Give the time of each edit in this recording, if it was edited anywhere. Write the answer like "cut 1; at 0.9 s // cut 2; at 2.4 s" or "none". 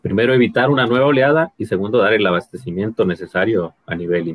none